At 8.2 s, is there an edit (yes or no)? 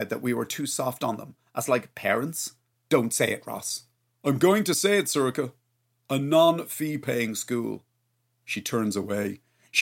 no